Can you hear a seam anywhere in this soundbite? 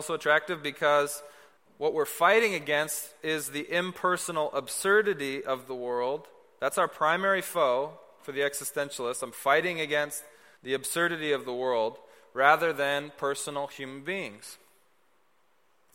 no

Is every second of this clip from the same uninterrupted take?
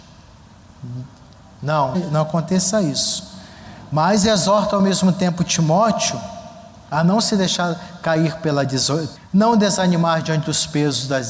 no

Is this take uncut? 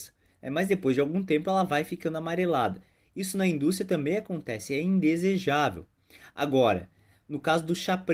yes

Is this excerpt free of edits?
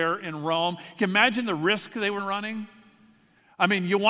no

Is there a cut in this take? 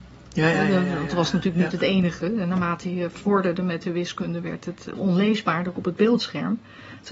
no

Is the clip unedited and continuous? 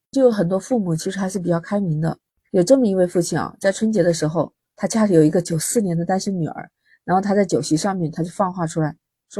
yes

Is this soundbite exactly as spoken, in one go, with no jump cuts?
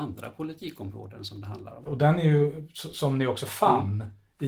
no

